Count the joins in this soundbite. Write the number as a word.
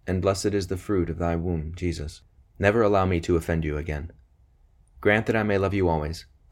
one